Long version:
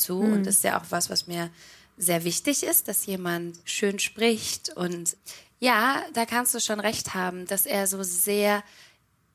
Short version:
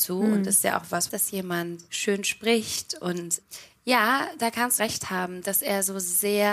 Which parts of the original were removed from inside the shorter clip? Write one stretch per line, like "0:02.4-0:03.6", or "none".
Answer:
0:01.1-0:02.8
0:06.5-0:06.8